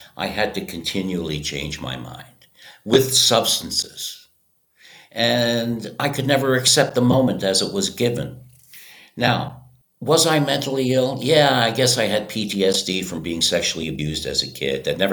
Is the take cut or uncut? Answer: uncut